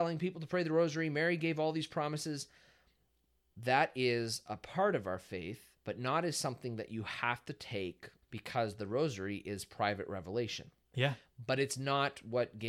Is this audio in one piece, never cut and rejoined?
no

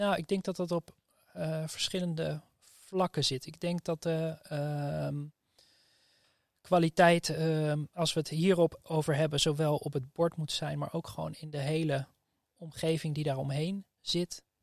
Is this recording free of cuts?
yes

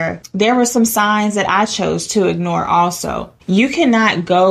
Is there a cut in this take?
yes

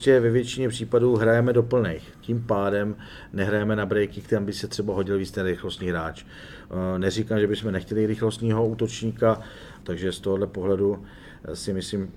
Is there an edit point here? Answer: yes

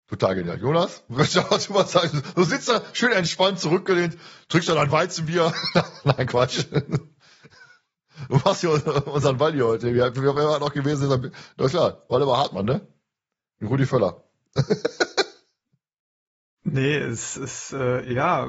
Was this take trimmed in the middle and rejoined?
no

